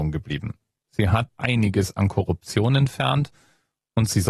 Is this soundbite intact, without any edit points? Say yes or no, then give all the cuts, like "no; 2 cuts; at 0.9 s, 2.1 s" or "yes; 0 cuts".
no; 1 cut; at 1.3 s